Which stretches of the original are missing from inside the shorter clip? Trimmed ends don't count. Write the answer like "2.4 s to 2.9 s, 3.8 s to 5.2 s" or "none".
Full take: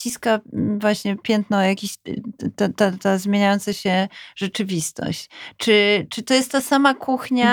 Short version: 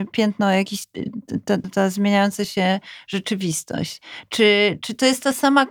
2.8 s to 2.9 s